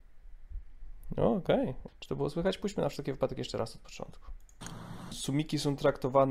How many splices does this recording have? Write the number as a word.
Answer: two